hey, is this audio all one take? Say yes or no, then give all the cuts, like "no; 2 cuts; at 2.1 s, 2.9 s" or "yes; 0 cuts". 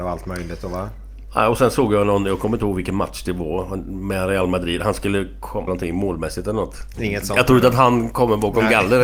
no; 2 cuts; at 5.7 s, 6.9 s